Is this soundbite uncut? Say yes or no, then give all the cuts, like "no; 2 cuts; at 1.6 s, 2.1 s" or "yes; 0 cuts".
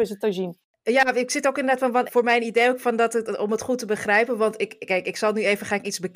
no; 1 cut; at 2.1 s